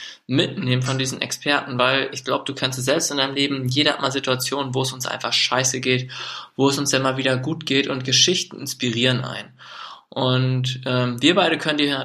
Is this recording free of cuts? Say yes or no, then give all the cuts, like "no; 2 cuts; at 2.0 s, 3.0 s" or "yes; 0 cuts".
yes; 0 cuts